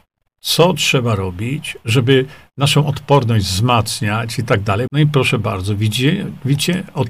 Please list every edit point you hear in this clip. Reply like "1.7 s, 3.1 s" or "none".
4.9 s